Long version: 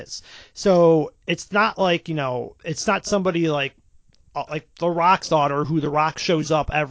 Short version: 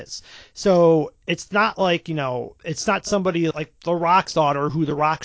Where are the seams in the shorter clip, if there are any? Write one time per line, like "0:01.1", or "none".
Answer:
0:03.5